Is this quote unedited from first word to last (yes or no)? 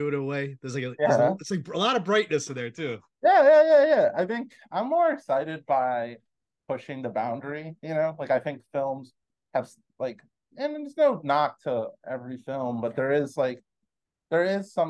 yes